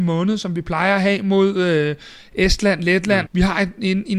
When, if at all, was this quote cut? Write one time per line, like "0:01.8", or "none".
0:03.3